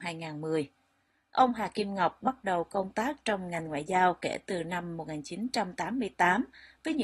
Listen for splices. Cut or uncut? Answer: uncut